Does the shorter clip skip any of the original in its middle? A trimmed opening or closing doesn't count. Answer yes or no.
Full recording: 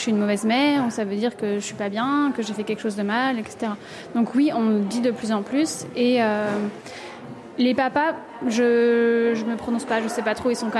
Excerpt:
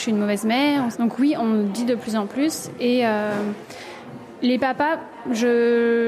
yes